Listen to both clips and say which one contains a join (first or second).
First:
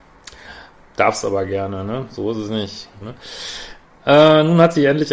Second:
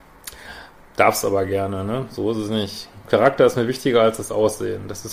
first